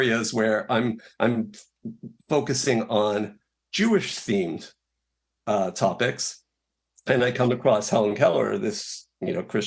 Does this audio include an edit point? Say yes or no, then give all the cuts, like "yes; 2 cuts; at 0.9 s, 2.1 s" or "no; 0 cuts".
no; 0 cuts